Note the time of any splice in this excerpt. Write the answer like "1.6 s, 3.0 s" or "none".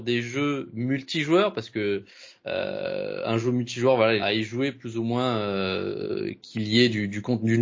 4.2 s